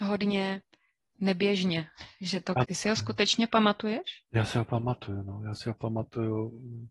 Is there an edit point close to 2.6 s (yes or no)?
yes